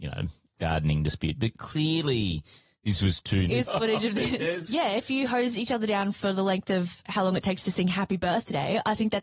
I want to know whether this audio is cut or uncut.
cut